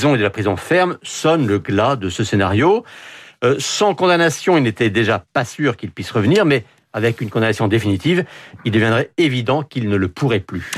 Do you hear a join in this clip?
no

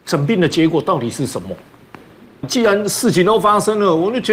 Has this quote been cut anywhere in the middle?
yes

